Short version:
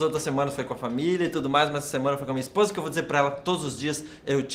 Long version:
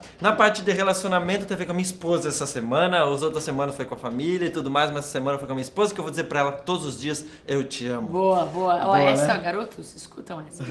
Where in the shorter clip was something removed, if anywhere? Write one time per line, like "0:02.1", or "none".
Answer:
none